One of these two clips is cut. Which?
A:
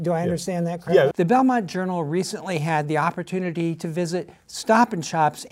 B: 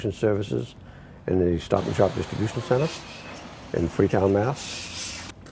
A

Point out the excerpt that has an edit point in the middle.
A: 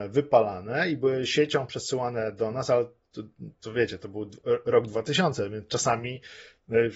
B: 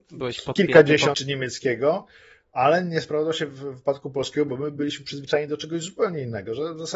B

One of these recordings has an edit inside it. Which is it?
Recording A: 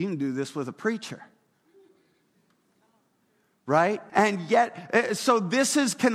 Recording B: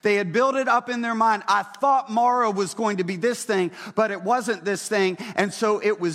A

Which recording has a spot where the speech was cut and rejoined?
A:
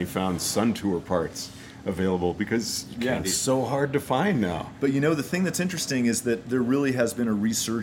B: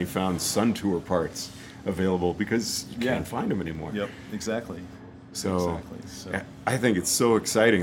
A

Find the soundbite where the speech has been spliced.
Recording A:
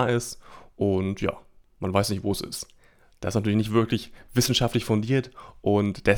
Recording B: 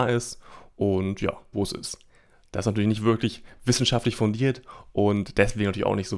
B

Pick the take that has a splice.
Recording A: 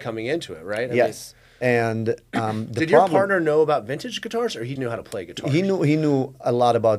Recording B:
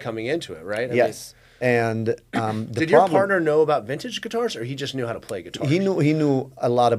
A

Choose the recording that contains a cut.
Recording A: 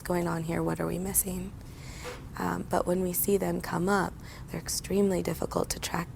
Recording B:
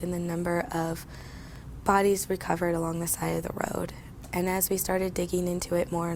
A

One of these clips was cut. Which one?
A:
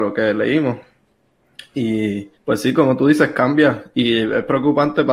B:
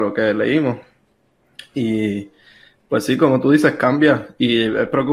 A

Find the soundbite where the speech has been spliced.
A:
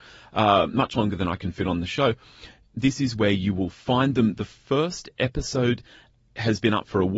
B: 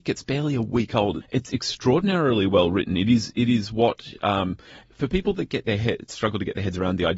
B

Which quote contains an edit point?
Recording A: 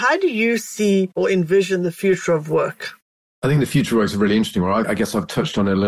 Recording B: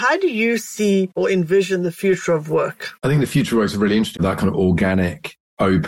B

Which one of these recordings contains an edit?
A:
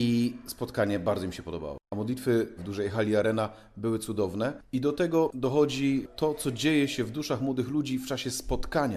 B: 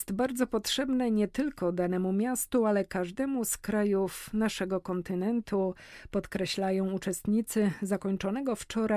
A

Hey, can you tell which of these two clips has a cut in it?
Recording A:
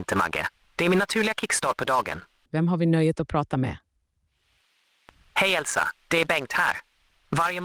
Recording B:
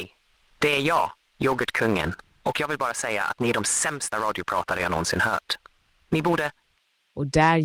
A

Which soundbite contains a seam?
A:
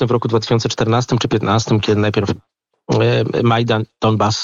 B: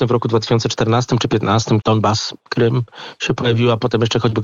B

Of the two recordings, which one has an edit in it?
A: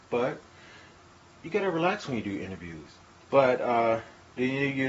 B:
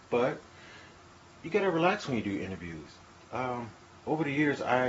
A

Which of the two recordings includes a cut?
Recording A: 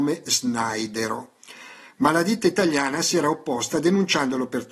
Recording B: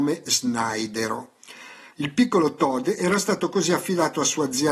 B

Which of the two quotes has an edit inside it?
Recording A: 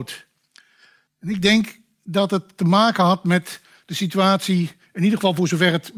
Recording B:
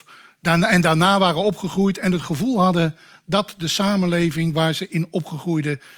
A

